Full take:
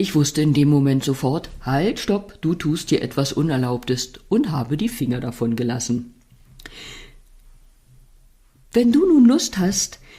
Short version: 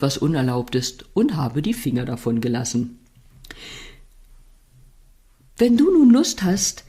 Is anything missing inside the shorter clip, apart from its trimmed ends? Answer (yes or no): no